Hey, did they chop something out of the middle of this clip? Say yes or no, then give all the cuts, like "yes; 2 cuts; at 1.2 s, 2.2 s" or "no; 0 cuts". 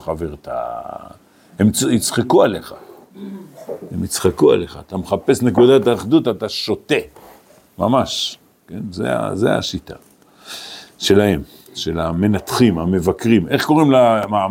no; 0 cuts